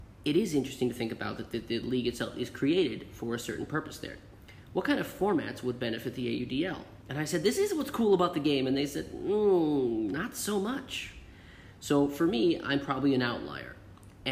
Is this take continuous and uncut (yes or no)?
no